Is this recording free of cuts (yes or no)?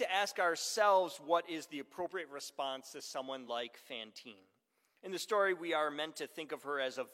yes